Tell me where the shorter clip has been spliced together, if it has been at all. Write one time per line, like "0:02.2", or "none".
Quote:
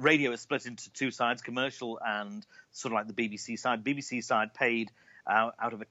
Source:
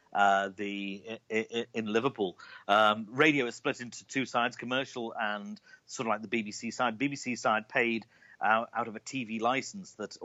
none